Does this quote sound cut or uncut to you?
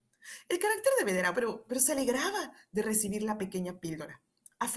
cut